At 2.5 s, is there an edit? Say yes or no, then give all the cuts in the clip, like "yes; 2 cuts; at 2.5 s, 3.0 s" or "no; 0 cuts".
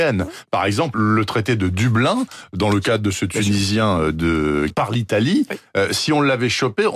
no; 2 cuts; at 0.9 s, 4.7 s